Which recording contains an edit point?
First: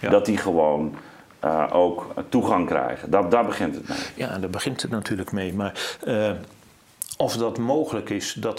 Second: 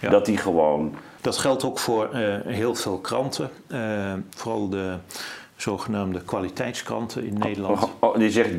second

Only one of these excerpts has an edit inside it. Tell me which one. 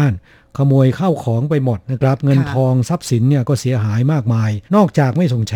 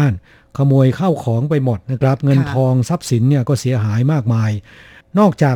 first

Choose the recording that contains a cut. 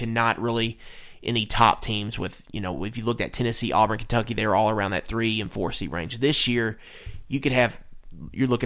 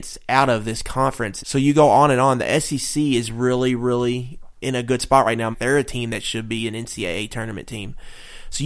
second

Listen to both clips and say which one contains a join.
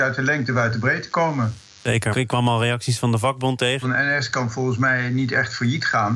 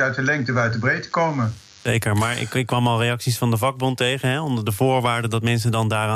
first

